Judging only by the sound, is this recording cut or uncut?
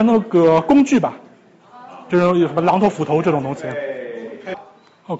uncut